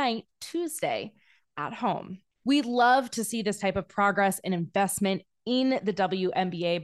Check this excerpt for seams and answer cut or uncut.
uncut